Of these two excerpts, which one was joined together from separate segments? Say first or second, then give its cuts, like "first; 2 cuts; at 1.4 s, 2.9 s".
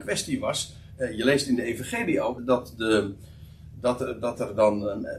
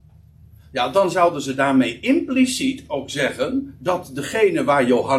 first; 1 cut; at 2.4 s